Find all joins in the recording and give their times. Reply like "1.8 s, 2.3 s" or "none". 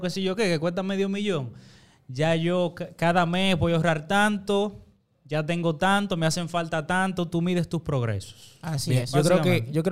none